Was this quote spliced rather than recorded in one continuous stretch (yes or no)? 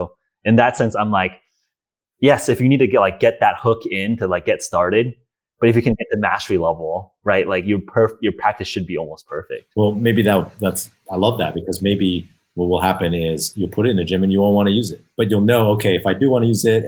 no